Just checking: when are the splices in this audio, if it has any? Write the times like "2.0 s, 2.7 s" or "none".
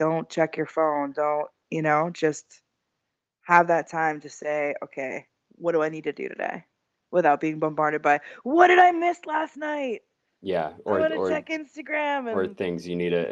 none